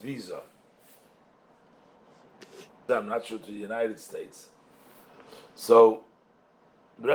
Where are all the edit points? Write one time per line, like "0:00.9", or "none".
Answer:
0:02.9